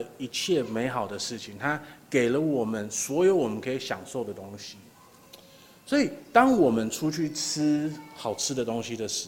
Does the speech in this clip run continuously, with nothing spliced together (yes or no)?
yes